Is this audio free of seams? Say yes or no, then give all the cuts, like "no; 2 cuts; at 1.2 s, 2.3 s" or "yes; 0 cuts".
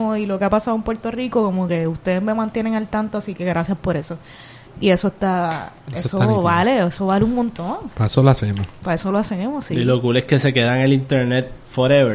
yes; 0 cuts